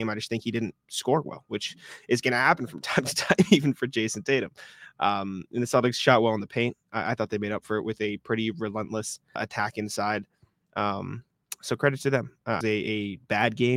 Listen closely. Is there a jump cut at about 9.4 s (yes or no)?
yes